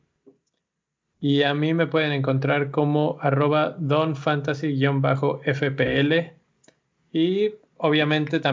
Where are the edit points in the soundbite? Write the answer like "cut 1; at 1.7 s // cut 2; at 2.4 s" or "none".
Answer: none